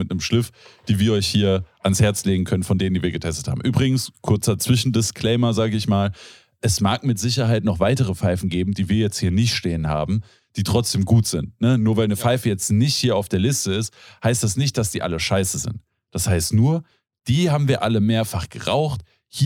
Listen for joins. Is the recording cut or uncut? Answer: uncut